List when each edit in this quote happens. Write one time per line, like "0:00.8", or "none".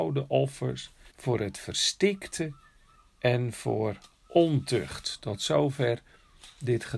0:01.1